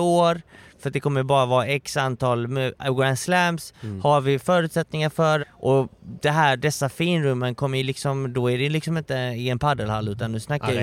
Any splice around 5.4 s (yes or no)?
yes